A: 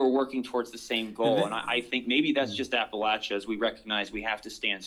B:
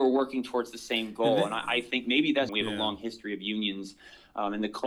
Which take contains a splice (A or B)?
B